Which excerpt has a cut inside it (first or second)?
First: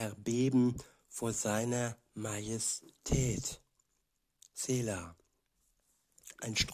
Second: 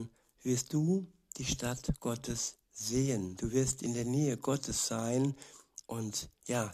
second